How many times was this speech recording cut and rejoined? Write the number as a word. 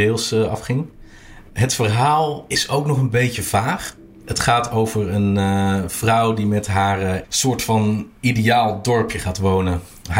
one